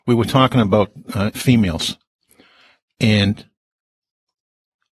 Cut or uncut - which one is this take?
cut